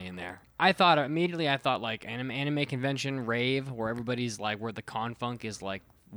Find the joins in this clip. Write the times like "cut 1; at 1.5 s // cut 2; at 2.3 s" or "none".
none